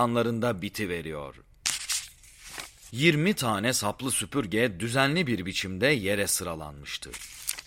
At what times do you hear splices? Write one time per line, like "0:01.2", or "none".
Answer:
0:02.9